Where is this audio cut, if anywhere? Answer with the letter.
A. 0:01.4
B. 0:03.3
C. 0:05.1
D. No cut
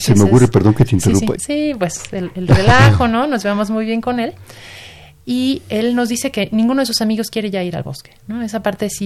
A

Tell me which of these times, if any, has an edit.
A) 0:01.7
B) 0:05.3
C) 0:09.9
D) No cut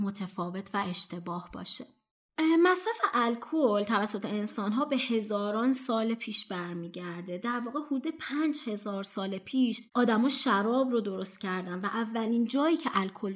C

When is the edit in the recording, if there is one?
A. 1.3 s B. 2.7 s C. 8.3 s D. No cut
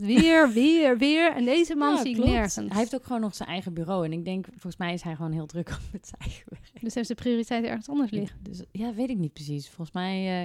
C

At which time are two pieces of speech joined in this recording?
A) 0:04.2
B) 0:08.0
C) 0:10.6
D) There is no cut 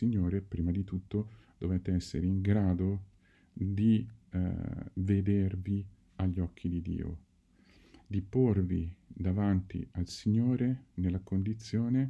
D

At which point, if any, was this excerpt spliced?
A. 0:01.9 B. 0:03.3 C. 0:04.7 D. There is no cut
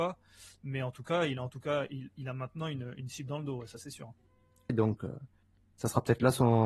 C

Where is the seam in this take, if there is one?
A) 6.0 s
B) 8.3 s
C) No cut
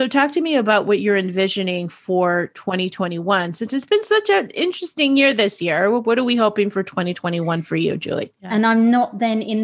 B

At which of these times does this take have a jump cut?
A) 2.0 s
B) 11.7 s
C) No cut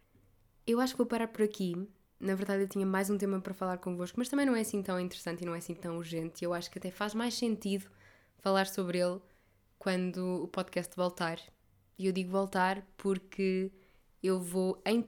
C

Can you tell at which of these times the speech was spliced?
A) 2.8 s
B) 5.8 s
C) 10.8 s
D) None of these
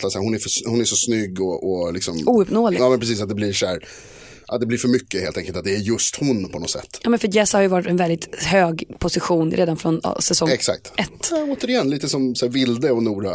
A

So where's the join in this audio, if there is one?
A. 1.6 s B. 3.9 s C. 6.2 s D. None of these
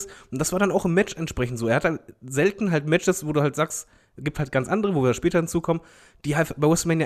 D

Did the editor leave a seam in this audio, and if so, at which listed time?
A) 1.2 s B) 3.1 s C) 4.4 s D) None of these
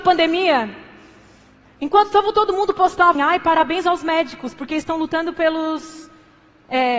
B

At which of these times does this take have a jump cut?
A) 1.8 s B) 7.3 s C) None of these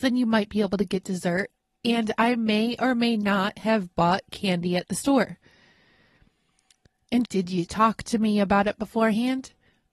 B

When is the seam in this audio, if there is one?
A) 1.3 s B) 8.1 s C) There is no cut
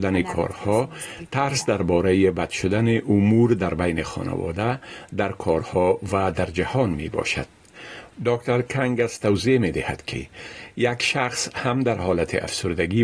B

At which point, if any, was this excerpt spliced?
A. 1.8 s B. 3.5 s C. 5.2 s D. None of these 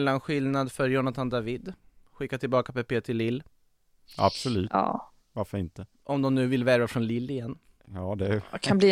C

